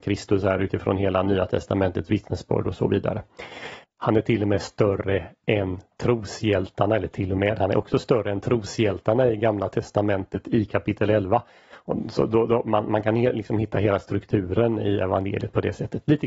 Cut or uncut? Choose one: cut